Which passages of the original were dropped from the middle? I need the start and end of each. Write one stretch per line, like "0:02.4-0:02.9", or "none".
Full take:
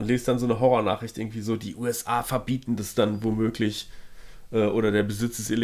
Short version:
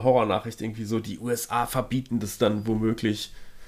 none